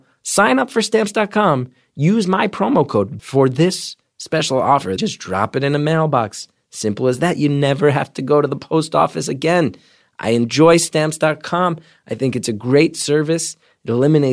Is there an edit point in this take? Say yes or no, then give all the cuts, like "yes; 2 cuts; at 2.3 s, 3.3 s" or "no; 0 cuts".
yes; 2 cuts; at 3.2 s, 5.0 s